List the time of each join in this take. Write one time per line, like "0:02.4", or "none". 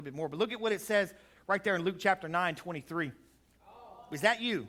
0:03.6